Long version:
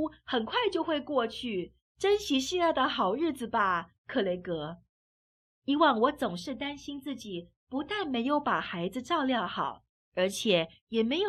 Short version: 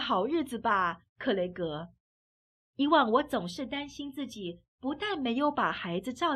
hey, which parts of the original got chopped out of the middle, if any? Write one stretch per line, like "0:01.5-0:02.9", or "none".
none